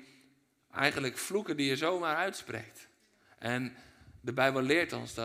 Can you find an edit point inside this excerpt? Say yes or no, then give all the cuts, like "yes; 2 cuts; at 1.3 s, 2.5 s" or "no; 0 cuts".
yes; 1 cut; at 3.2 s